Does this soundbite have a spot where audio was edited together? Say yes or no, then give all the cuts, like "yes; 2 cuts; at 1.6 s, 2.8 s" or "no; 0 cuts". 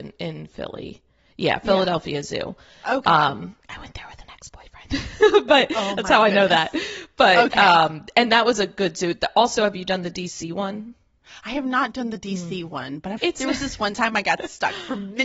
yes; 1 cut; at 13.2 s